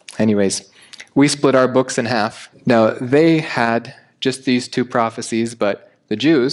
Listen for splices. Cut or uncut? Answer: cut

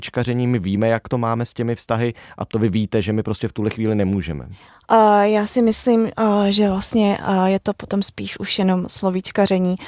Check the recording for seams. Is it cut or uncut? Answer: cut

